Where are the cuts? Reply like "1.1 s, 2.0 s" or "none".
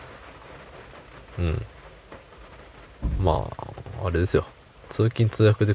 none